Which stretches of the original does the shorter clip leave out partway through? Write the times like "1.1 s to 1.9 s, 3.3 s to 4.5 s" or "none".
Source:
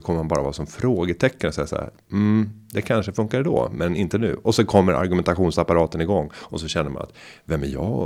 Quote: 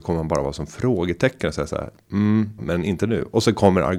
2.6 s to 3.7 s